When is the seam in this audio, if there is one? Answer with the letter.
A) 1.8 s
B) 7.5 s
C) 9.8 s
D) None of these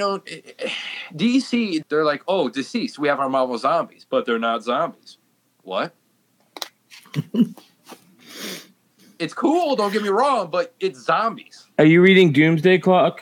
A